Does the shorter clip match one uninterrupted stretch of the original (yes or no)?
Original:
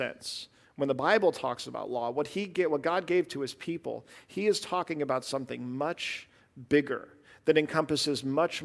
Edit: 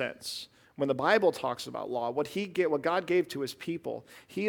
yes